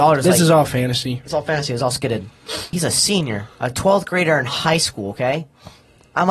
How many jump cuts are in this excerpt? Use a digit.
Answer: 1